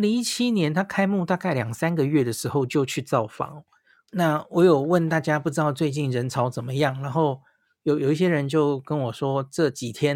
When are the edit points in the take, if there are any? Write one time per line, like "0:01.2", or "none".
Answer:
0:04.1